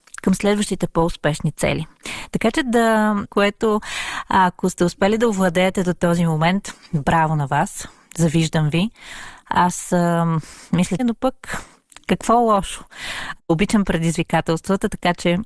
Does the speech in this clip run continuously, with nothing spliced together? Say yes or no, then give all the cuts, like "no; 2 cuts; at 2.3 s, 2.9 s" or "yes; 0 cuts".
no; 2 cuts; at 3.2 s, 11.0 s